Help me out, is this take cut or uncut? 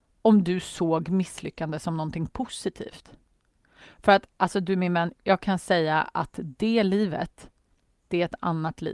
uncut